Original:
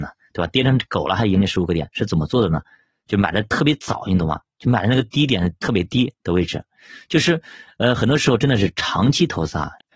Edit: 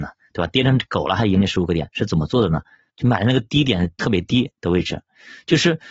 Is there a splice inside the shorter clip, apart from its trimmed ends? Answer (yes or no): yes